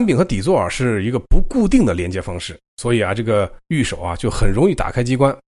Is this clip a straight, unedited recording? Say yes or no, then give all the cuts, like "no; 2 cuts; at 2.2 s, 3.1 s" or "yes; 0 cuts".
yes; 0 cuts